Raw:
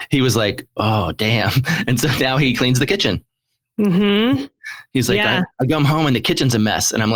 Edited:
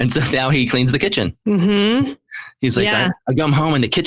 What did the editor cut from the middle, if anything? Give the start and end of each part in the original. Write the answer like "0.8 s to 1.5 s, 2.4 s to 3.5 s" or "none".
3.3 s to 3.7 s